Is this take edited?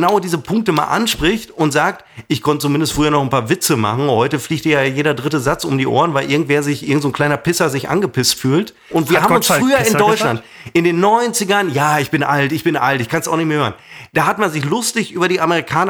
yes; 1 cut; at 8.9 s

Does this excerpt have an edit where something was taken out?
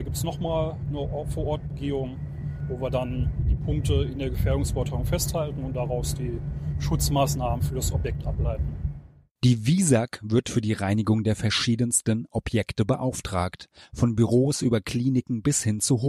no; 0 cuts

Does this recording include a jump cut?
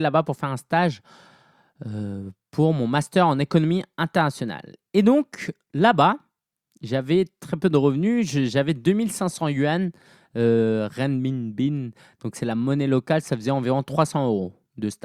no; 0 cuts

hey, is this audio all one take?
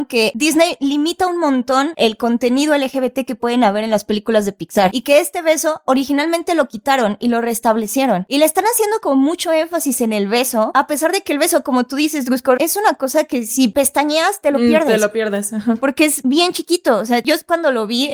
no; 1 cut; at 12.6 s

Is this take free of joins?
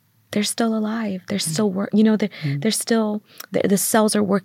yes; 0 cuts

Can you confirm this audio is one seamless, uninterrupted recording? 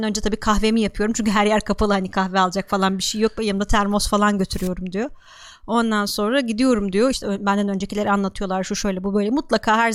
no; 1 cut; at 7.1 s

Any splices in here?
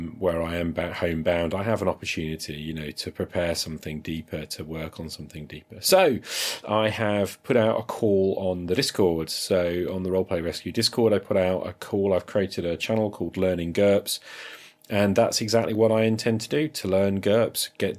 yes; 1 cut; at 6.6 s

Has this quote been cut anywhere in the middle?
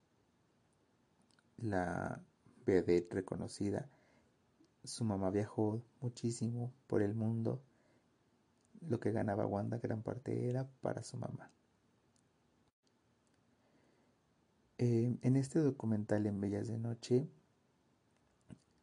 no; 0 cuts

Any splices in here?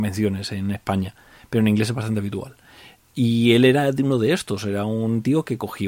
no; 0 cuts

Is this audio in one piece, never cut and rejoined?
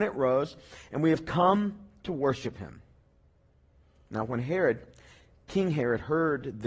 yes; 0 cuts

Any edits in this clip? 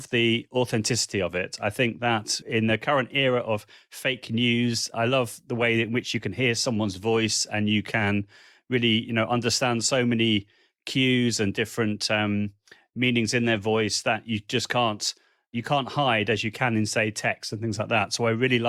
no; 0 cuts

